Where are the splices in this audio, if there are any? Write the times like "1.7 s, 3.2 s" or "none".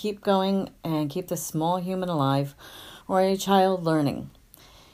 none